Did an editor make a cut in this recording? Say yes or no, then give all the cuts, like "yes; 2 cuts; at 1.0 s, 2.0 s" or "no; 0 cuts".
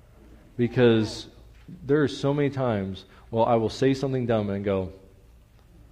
no; 0 cuts